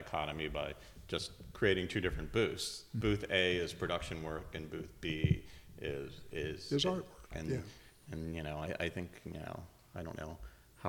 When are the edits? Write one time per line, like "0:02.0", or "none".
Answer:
0:07.3